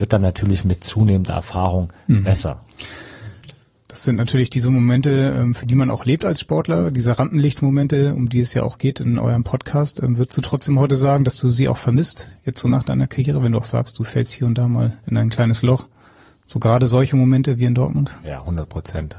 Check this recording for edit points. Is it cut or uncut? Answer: uncut